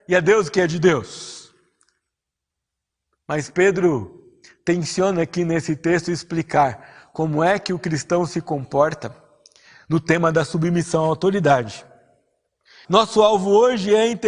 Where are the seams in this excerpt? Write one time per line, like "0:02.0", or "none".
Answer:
0:12.8